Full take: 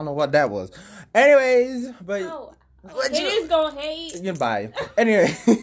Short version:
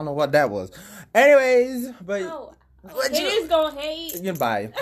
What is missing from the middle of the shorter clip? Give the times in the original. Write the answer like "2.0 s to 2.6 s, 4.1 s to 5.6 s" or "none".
none